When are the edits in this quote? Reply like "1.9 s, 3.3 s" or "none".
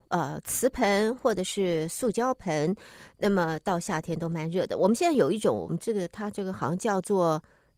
none